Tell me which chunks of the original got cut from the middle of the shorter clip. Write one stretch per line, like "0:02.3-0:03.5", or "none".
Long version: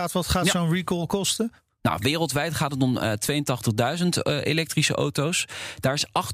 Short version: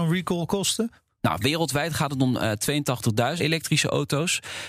0:04.0-0:04.4